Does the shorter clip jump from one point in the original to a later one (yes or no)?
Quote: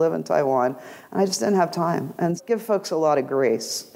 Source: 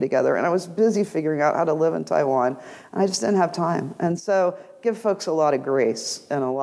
yes